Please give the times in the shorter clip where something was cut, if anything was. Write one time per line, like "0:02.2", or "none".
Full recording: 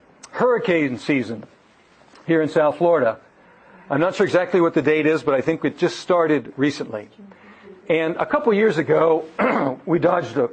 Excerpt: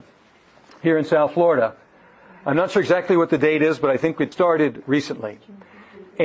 0:04.3